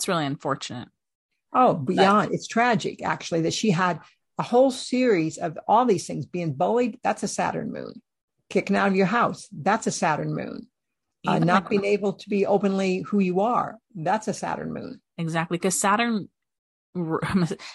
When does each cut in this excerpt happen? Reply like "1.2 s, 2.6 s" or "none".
none